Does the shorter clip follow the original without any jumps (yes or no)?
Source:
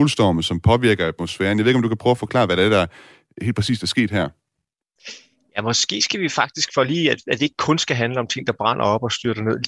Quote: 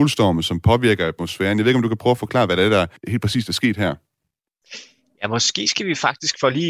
no